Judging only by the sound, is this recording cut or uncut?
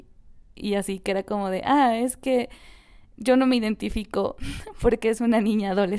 uncut